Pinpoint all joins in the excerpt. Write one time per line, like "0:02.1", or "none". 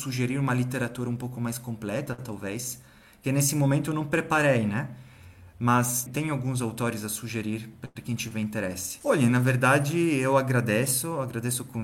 0:06.1
0:09.0